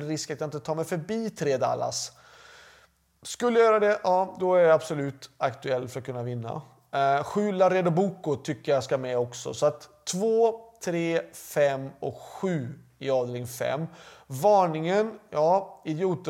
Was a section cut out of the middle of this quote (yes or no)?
no